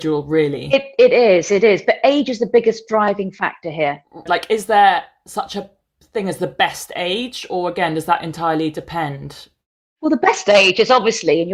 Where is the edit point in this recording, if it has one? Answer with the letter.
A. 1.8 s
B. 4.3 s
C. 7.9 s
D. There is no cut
B